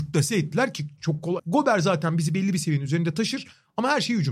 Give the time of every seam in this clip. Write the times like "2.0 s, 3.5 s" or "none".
1.4 s

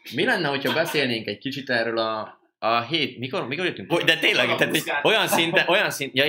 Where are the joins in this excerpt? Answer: 3.9 s

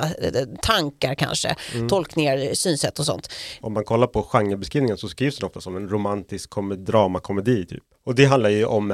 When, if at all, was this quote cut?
3.6 s, 7.9 s

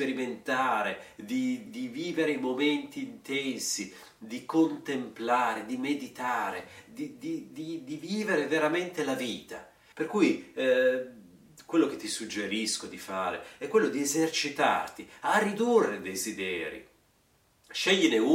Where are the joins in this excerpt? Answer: 1.7 s, 9.9 s

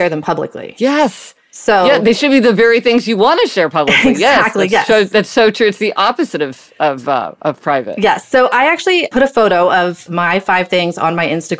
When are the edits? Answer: none

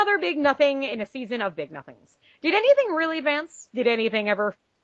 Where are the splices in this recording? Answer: none

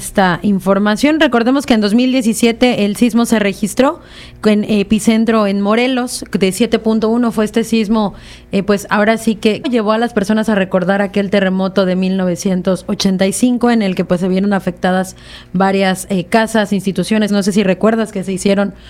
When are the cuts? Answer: 9.6 s, 17.3 s

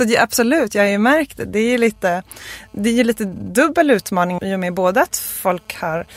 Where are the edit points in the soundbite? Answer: 4.4 s

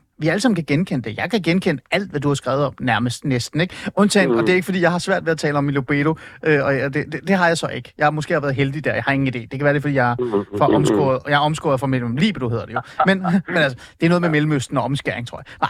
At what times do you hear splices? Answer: none

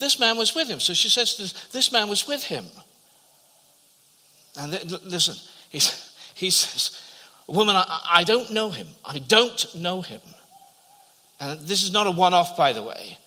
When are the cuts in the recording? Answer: none

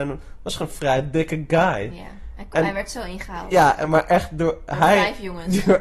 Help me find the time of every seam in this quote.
none

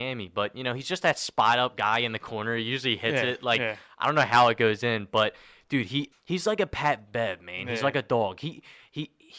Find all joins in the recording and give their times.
6.1 s

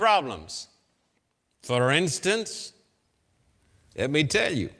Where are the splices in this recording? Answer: none

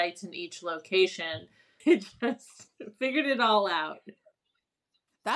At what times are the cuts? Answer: 1.8 s

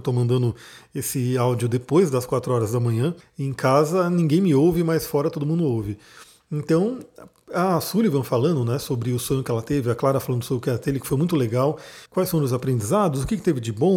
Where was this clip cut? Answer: 3.2 s, 12.1 s

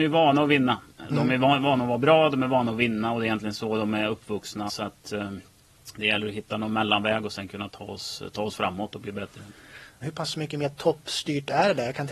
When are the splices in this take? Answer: 4.7 s, 10.0 s

